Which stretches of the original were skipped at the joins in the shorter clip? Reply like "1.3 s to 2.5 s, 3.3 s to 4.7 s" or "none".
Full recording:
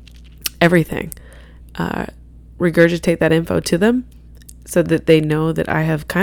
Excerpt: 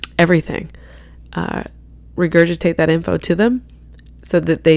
none